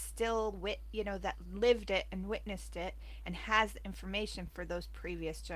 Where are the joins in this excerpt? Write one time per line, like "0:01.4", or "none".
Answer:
none

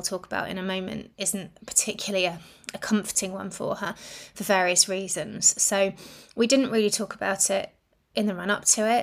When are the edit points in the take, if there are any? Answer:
none

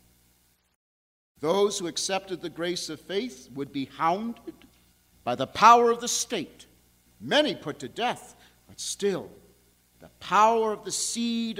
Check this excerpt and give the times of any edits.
0:07.1

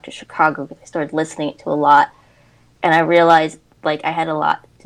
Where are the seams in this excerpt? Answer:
none

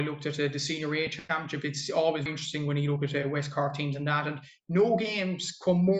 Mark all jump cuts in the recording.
0:02.3

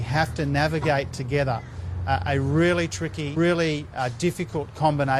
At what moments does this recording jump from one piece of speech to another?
0:03.4

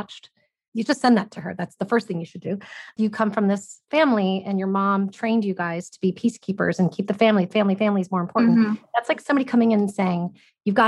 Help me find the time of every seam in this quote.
0:03.0

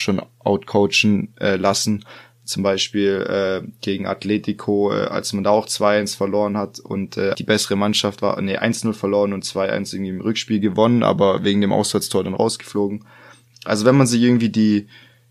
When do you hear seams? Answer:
0:07.3

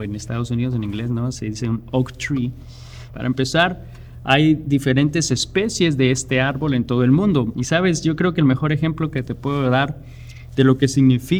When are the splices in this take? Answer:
0:03.1
0:07.5

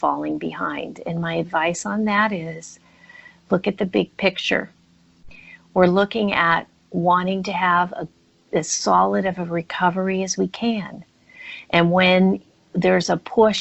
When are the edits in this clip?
none

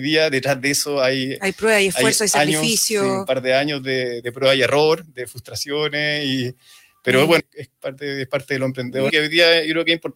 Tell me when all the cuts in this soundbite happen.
0:04.2
0:07.4
0:09.1

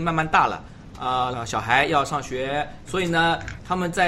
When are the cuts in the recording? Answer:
0:01.3
0:02.8

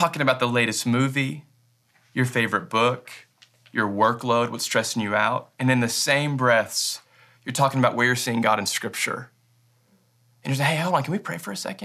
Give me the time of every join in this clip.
none

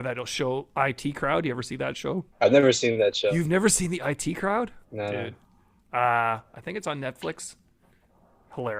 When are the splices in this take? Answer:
0:02.3
0:04.8

